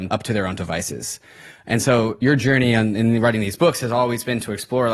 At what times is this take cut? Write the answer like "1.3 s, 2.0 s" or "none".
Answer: none